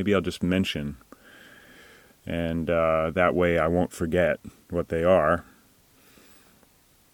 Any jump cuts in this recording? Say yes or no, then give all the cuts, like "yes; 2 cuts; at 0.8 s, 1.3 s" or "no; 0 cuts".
no; 0 cuts